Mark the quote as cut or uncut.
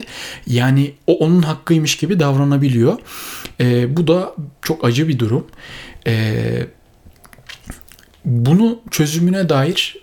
uncut